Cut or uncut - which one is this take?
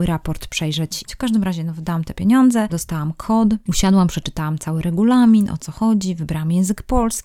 cut